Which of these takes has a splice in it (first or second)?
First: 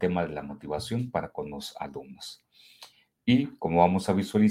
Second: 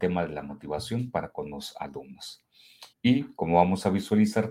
second